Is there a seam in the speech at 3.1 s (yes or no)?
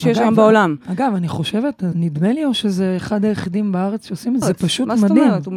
no